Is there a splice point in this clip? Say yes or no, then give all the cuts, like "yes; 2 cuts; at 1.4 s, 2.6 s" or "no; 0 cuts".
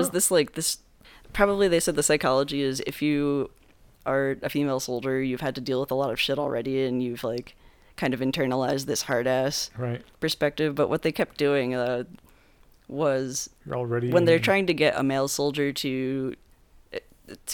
yes; 1 cut; at 13.6 s